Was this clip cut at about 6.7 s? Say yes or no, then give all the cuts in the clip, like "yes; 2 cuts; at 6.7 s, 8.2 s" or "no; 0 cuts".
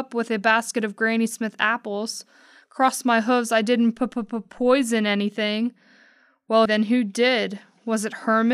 yes; 1 cut; at 6.7 s